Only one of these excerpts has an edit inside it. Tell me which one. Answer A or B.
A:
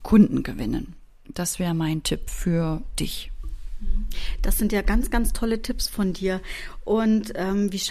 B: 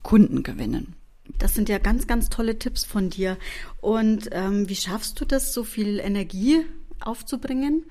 B